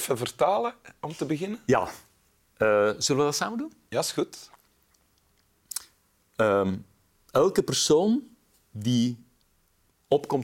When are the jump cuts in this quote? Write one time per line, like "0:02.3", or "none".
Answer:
none